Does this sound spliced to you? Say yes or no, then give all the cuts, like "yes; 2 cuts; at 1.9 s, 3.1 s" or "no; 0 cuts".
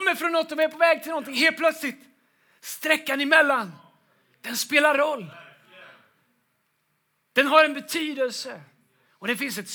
no; 0 cuts